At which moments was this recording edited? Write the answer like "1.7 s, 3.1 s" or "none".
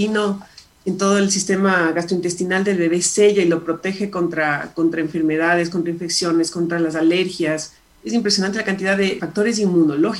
7.9 s, 9.2 s